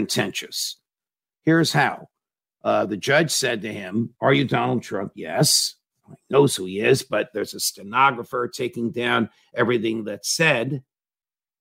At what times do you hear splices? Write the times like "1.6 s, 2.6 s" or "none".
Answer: none